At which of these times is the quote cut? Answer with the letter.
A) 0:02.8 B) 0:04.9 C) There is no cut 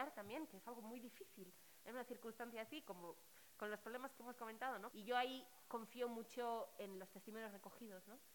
B